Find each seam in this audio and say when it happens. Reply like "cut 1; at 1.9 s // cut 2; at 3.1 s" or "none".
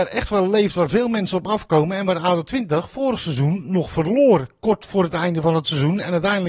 none